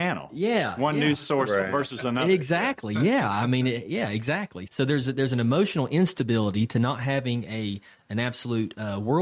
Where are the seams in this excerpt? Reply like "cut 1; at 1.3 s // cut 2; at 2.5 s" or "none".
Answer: cut 1; at 4.7 s